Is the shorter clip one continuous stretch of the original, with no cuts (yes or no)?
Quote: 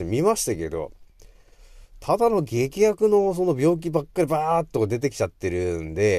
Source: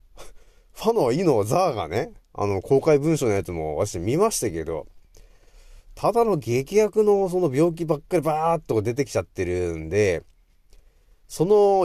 yes